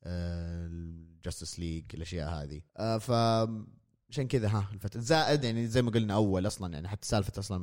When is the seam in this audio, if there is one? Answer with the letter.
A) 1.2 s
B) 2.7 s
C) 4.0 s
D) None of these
B